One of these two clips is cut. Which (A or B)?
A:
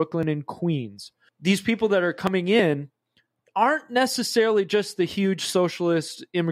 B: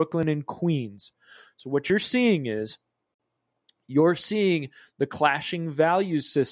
A